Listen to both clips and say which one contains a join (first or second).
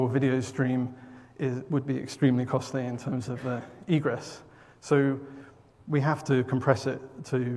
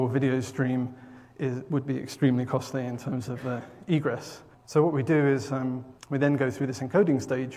second